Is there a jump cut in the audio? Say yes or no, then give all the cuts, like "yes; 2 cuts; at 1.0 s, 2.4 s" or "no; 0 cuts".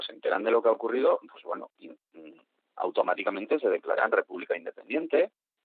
no; 0 cuts